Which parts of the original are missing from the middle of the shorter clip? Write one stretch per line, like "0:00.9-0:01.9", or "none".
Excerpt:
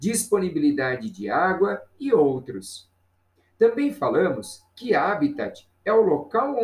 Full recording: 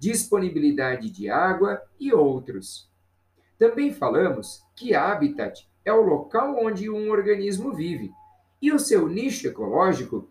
none